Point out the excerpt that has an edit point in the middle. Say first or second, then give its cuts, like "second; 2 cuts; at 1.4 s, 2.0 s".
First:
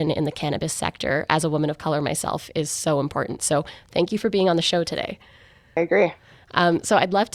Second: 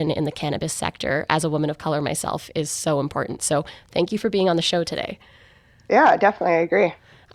first; 1 cut; at 5.8 s